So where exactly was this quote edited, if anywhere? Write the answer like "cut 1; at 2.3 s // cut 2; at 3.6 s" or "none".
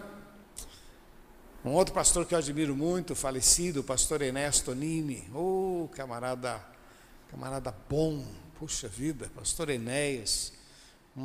none